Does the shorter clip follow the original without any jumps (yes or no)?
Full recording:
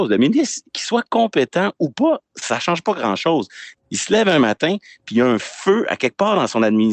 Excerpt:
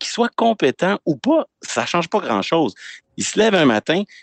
yes